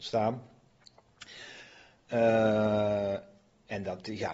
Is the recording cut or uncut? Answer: uncut